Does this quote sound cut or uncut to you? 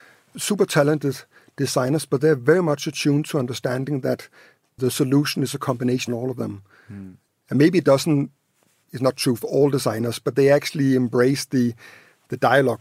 uncut